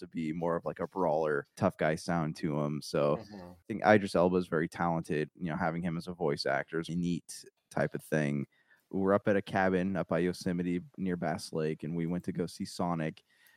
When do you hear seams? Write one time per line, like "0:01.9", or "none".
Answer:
0:05.3
0:06.9
0:08.8